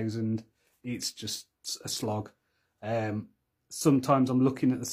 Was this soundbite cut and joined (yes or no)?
no